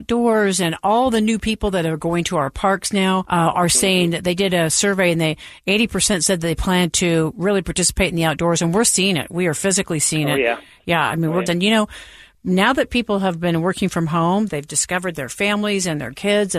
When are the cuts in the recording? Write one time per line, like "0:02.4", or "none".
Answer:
0:11.5
0:14.5